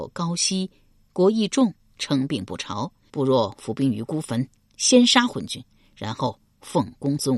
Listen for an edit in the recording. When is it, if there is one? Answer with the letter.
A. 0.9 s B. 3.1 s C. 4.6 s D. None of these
B